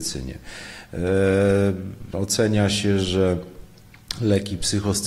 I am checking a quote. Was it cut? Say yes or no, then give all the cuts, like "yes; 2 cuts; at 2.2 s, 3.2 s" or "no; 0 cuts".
yes; 1 cut; at 2.1 s